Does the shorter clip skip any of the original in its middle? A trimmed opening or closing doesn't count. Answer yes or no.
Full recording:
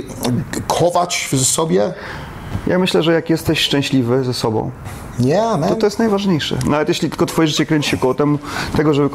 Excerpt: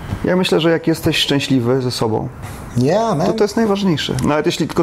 no